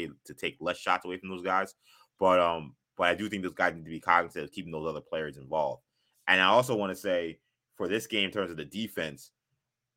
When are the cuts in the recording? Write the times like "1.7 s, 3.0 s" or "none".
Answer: none